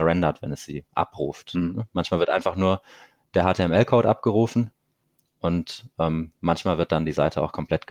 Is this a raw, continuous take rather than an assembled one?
yes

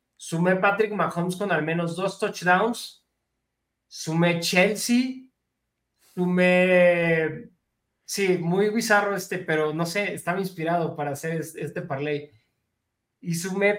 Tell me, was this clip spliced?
no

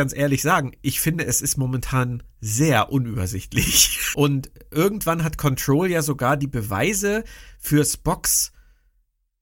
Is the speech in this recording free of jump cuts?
no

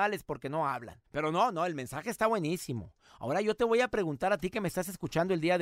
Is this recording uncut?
yes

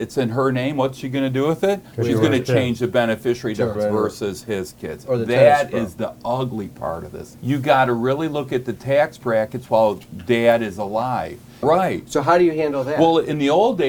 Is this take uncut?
no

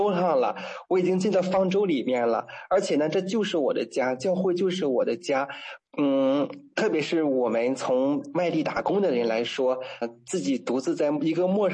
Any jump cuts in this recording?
yes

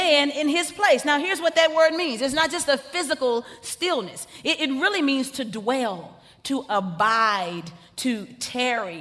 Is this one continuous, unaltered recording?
yes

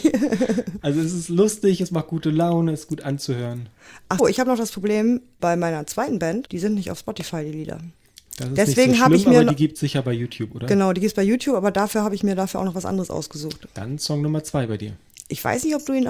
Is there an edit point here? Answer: yes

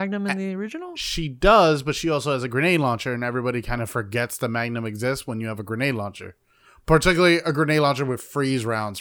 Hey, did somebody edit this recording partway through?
no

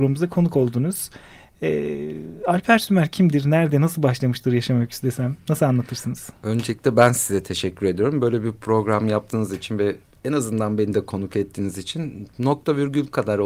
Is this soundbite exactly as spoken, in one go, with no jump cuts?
yes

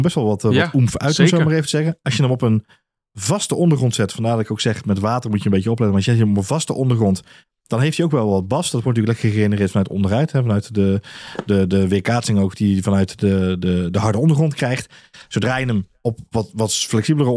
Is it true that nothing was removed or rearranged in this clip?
yes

